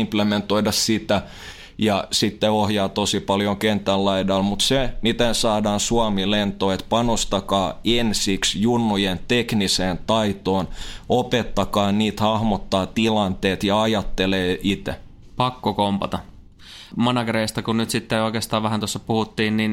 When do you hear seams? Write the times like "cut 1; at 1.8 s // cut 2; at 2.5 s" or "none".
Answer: none